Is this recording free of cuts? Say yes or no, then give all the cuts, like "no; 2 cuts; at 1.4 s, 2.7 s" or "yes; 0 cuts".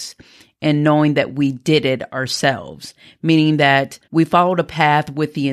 no; 1 cut; at 4.0 s